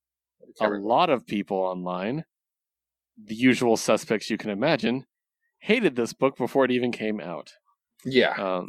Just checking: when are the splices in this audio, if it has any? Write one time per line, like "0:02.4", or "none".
none